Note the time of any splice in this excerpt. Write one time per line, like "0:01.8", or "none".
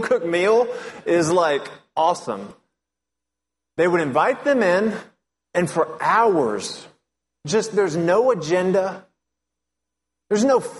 none